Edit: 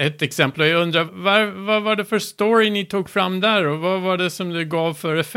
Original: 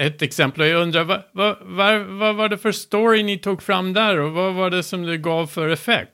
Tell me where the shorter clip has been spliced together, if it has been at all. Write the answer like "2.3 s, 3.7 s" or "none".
1.1 s